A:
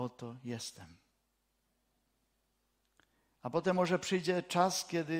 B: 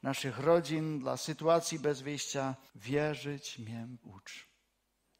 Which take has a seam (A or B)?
B